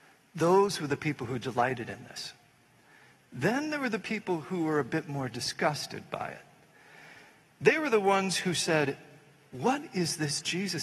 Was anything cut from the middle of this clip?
no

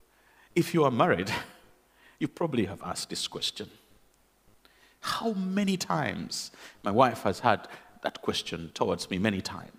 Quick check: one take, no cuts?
yes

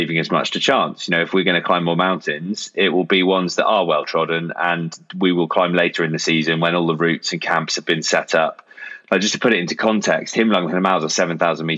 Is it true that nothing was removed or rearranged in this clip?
yes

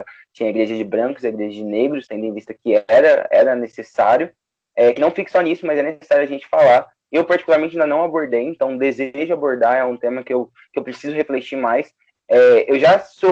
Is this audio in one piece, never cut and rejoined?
yes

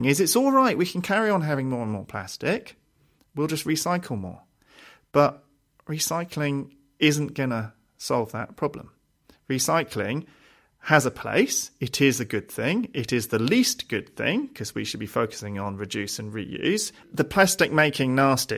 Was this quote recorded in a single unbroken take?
yes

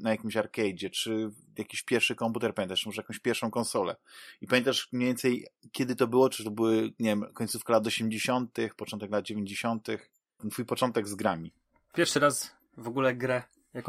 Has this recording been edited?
yes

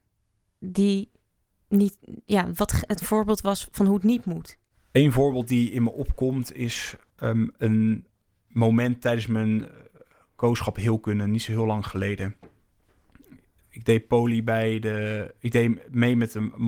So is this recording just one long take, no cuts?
yes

